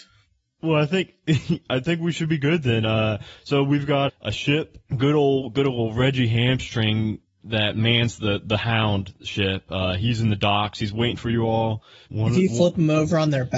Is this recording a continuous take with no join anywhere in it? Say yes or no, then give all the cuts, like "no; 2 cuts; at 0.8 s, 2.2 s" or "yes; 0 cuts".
no; 2 cuts; at 4.1 s, 12.1 s